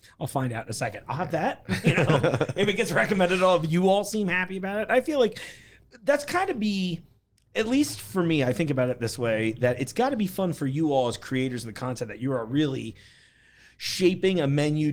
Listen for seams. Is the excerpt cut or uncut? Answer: uncut